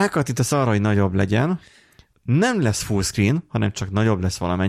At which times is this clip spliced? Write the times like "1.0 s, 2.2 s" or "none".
2.1 s